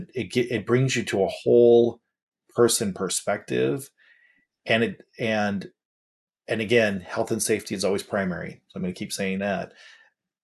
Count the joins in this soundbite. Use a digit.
0